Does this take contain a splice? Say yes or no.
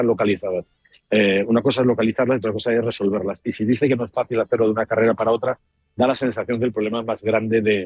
no